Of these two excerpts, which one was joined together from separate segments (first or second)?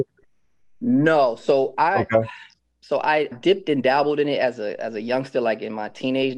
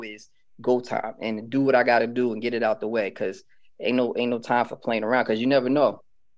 first